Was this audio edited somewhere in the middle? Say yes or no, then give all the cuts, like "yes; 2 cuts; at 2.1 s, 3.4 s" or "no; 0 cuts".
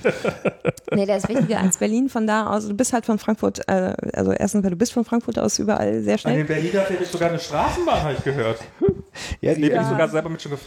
no; 0 cuts